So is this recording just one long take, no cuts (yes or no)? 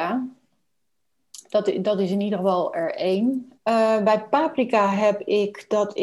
no